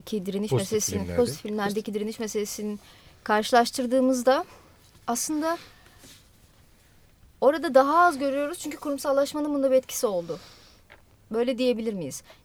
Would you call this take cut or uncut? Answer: uncut